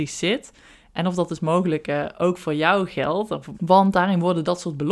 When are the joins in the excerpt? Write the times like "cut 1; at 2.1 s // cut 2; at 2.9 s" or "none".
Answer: cut 1; at 3.5 s